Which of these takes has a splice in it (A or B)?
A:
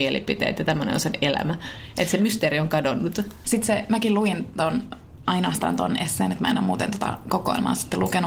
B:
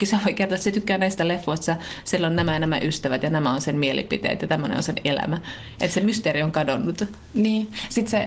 A